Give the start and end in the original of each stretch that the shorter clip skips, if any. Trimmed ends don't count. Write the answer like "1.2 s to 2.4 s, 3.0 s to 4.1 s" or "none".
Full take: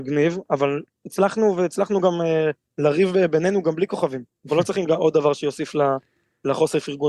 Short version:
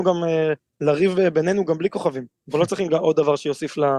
none